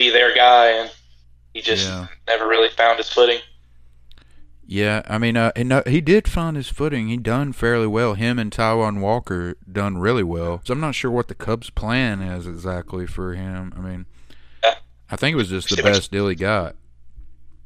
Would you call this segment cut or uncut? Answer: cut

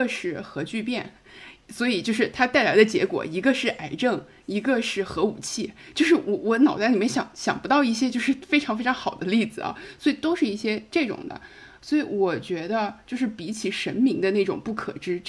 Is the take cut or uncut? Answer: uncut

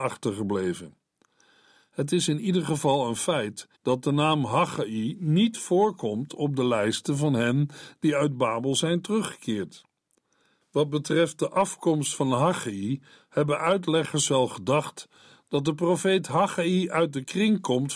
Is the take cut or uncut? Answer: cut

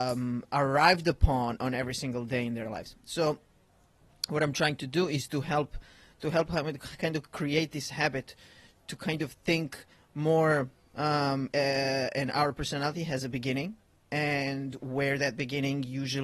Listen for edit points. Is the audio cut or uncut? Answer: cut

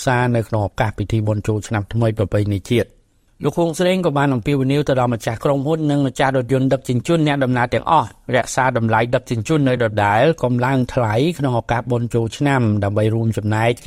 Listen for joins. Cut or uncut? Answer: uncut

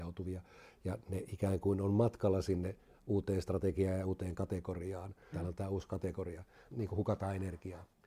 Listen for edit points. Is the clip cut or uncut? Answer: cut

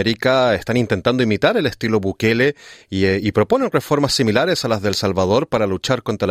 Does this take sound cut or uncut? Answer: uncut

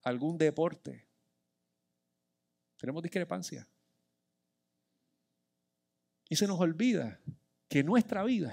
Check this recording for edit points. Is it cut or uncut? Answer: uncut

